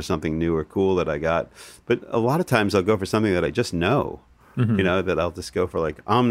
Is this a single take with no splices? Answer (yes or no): yes